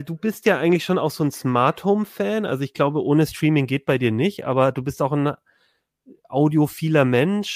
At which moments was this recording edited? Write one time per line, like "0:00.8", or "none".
none